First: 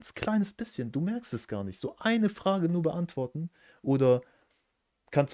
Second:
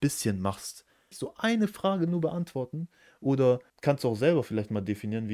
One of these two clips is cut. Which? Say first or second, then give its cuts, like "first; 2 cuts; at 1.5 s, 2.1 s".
second; 2 cuts; at 1.1 s, 3.7 s